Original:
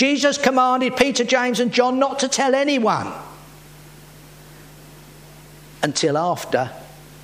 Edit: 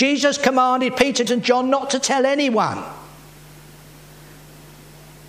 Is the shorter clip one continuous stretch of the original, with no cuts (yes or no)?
no